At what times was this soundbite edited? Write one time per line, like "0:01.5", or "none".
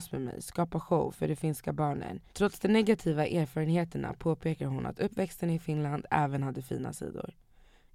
0:02.3